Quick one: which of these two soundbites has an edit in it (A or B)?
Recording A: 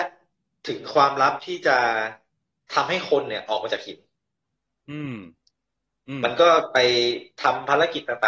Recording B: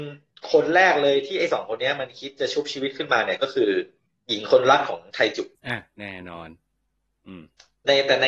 B